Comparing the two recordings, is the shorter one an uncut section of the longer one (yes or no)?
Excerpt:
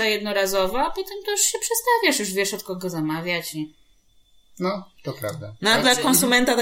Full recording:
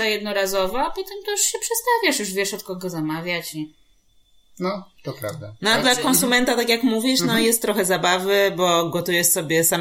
yes